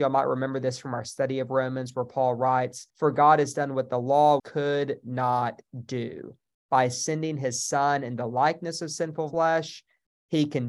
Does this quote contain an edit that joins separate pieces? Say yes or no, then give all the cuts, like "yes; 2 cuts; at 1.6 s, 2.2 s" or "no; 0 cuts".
yes; 1 cut; at 4.4 s